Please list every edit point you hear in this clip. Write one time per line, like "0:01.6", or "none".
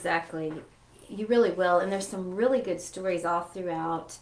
none